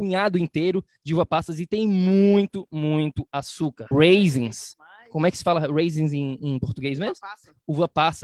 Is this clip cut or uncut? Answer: cut